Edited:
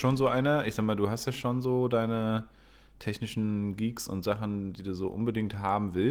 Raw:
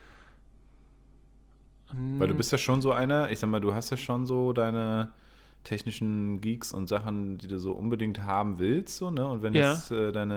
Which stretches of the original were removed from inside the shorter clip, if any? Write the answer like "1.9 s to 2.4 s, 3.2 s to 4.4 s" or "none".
none